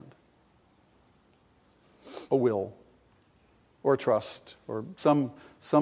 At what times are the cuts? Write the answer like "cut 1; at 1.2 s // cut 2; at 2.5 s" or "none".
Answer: cut 1; at 2.3 s